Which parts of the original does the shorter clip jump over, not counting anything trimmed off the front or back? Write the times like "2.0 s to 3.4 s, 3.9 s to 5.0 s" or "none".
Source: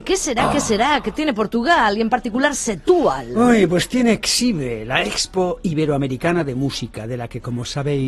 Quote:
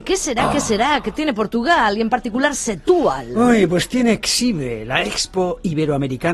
none

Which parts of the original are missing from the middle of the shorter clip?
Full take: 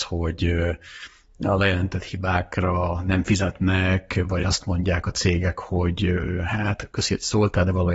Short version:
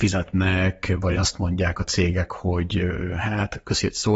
none

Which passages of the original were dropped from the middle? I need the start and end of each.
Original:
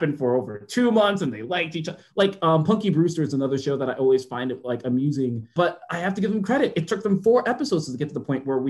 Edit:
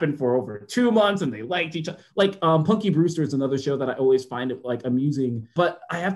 none

